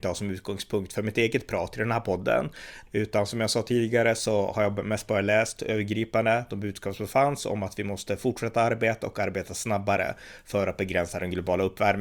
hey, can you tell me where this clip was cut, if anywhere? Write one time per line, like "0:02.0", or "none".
0:02.9